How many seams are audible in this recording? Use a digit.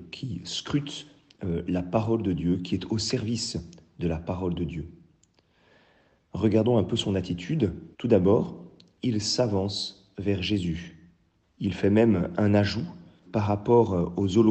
3